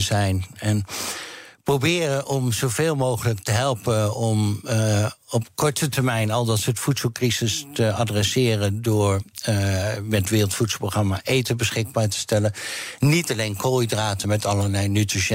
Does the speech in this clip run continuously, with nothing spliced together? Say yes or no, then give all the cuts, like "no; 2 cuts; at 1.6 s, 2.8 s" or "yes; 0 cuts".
no; 1 cut; at 14.2 s